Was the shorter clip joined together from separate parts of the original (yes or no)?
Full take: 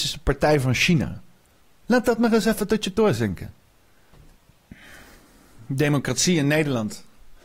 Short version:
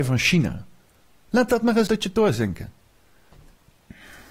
yes